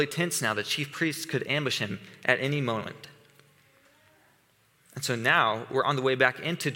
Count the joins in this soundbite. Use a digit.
0